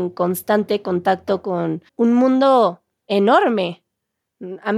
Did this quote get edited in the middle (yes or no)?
yes